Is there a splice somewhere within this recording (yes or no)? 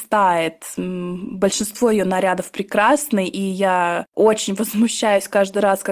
no